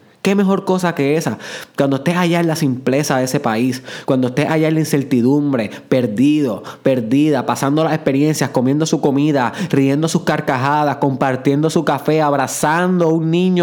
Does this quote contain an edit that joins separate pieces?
no; 0 cuts

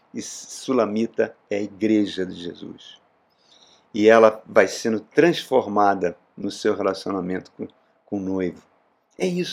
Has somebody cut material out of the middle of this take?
no; 0 cuts

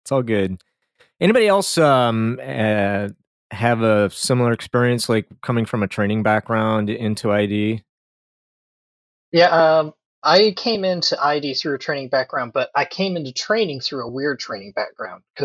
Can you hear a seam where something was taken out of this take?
no; 0 cuts

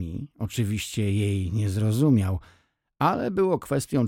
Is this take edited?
no; 0 cuts

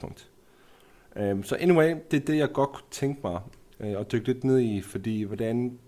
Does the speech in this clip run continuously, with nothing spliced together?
yes; 0 cuts

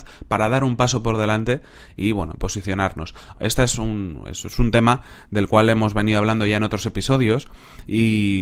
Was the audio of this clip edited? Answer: yes; 1 cut; at 3.3 s

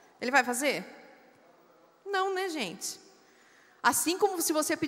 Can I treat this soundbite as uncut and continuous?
yes; 0 cuts

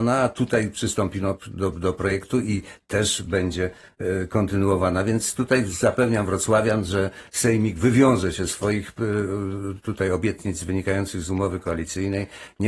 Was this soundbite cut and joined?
no; 0 cuts

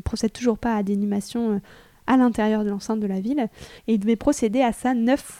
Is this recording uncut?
no; 1 cut; at 3.8 s

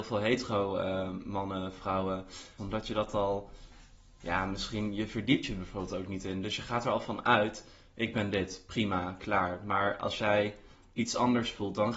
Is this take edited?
yes; 1 cut; at 2.6 s

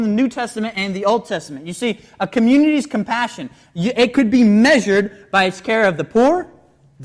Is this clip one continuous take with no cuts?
yes; 0 cuts

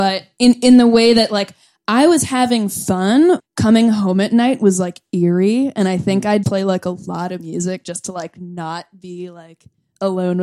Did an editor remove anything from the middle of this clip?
yes; 2 cuts; at 3.4 s, 6.4 s

